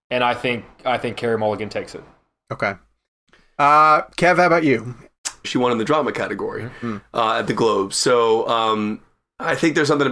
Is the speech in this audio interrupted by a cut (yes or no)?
yes